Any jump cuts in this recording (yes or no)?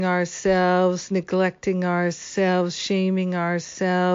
no